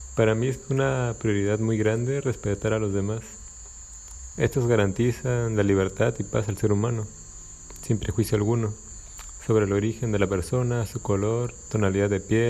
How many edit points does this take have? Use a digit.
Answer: 1